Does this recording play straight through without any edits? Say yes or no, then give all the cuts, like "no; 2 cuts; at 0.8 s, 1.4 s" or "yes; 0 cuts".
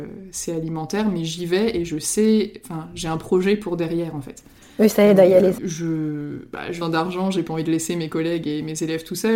no; 2 cuts; at 5.6 s, 6.8 s